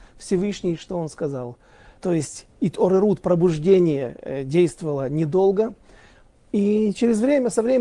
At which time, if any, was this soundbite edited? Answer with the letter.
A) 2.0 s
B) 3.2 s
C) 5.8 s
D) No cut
A